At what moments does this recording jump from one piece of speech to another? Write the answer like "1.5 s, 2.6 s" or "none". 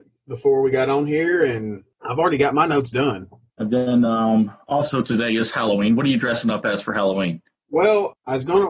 none